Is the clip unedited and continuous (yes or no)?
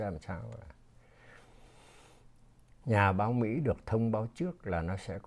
yes